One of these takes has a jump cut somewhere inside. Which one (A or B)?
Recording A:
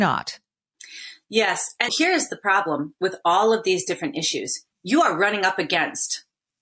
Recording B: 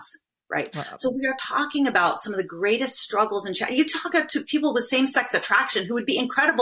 A